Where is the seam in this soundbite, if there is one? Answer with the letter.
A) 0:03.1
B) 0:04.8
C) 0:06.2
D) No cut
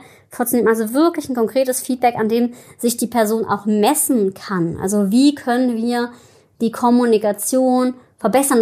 D